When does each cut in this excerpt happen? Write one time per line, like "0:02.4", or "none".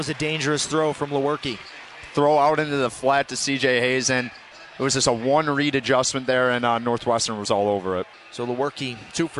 none